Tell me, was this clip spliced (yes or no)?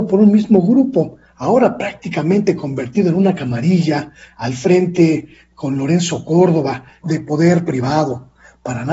yes